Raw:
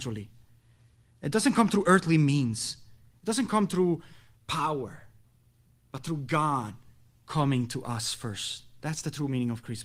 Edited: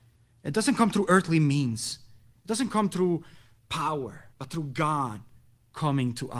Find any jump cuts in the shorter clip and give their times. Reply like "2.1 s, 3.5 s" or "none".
4.3 s